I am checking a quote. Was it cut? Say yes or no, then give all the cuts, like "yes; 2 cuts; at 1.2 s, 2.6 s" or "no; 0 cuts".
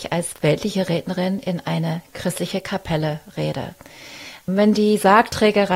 yes; 1 cut; at 4.4 s